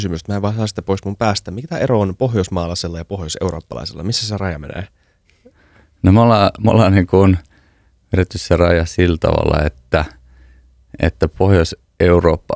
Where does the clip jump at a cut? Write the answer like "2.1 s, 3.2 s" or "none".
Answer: none